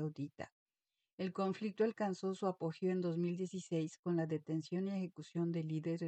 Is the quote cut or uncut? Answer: uncut